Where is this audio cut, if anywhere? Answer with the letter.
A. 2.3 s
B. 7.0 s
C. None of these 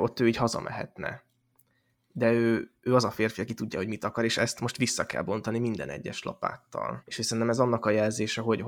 B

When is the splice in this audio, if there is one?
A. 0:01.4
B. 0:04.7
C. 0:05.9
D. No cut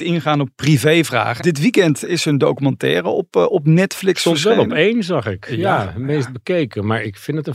A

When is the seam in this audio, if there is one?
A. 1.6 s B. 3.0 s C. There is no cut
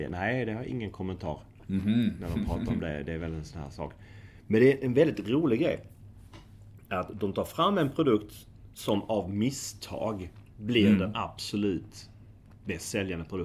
C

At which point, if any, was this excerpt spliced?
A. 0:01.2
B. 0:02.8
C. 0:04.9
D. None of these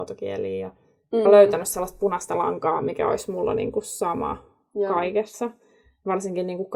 A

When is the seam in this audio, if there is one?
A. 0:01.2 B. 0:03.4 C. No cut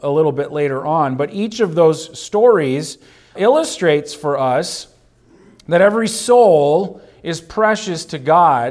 B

